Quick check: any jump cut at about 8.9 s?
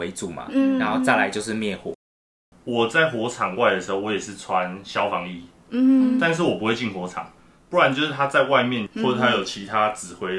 yes; 3 cuts; at 2.5 s, 7.6 s, 8.9 s

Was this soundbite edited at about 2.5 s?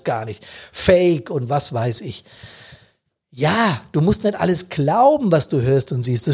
no; 0 cuts

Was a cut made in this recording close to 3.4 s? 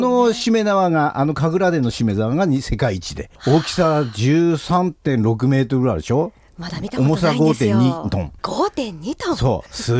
yes; 2 cuts; at 3.4 s, 8.4 s

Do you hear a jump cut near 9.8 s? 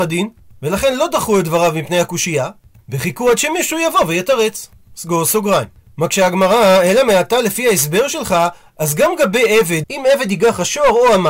yes; 1 cut; at 9.8 s

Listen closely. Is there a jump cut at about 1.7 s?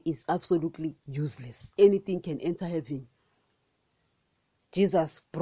yes; 1 cut; at 1.7 s

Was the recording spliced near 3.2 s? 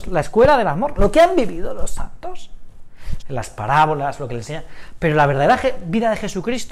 yes; 1 cut; at 3.2 s

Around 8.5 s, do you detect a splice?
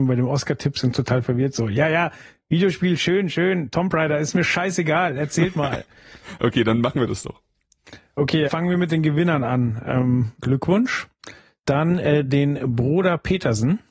yes; 2 cuts; at 8.5 s, 10.4 s

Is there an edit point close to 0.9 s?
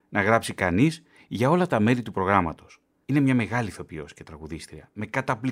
no; 1 cut; at 3.0 s

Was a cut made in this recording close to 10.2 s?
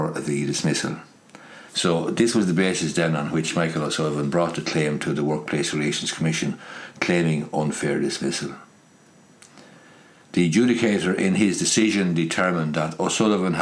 no; 1 cut; at 1.7 s

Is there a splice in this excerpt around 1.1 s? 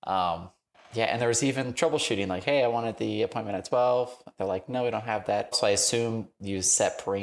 no; 1 cut; at 5.5 s

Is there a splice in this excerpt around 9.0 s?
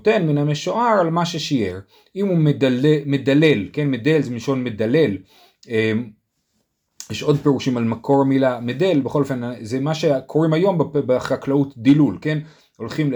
no; 0 cuts

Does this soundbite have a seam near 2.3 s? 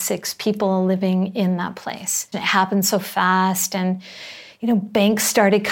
yes; 1 cut; at 2.3 s

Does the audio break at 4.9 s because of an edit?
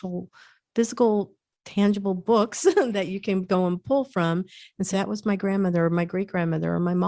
yes; 1 cut; at 4.9 s

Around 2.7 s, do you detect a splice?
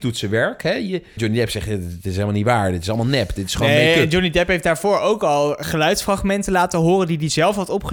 no; 1 cut; at 1.2 s

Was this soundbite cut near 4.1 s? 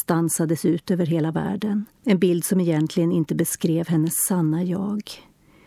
no; 1 cut; at 2.0 s

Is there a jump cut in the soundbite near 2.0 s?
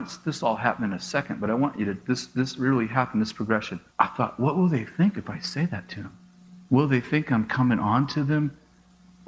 no; 2 cuts; at 3.9 s, 6.7 s

